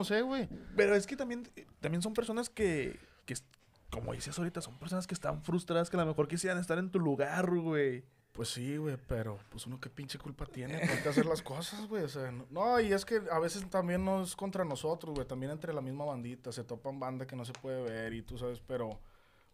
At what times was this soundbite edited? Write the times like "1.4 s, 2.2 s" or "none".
none